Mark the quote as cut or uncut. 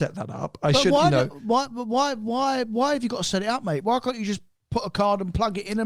uncut